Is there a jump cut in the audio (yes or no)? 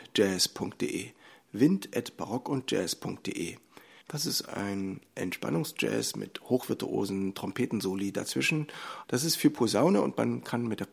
yes